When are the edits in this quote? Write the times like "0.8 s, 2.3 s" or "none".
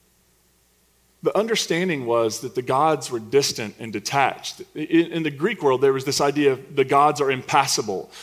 none